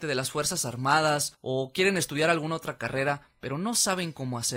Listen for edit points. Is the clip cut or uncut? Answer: uncut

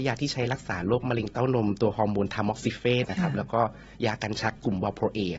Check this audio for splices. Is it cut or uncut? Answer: cut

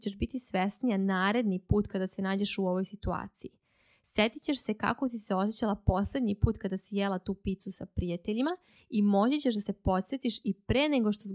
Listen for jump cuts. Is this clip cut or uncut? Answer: uncut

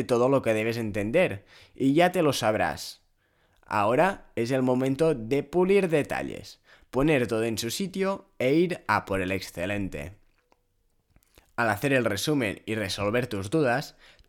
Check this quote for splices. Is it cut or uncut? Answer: uncut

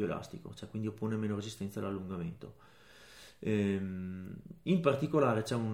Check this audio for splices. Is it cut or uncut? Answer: uncut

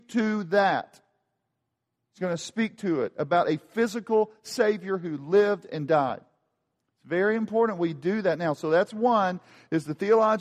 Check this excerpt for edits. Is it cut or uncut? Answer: uncut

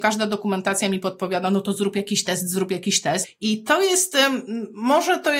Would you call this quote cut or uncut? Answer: cut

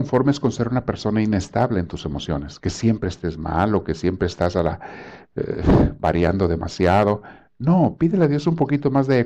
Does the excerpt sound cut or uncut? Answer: uncut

